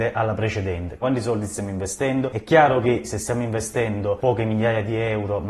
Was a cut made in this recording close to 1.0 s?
yes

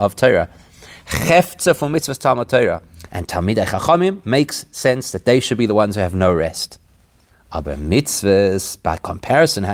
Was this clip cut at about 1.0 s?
no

